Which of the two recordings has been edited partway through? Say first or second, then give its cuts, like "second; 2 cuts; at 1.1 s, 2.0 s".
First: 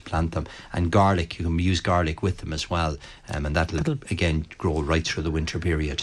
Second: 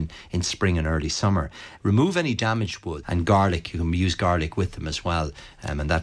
second; 2 cuts; at 1.8 s, 3.0 s